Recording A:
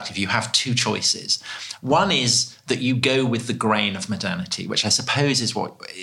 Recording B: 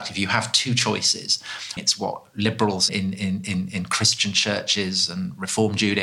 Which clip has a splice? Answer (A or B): B